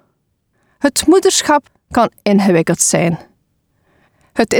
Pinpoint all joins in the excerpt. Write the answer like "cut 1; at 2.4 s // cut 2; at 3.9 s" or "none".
none